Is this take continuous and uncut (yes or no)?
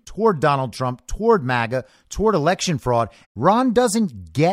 no